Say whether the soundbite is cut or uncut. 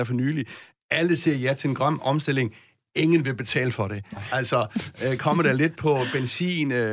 uncut